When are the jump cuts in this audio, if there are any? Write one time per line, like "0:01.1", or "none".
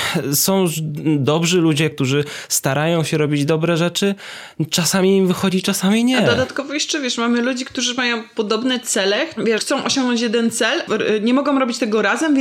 0:01.9
0:09.6
0:10.9